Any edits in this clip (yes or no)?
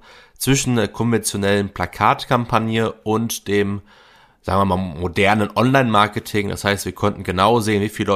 no